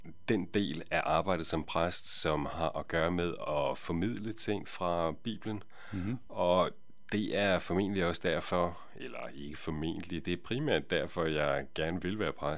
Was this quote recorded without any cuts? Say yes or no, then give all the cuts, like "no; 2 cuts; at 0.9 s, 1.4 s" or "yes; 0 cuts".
yes; 0 cuts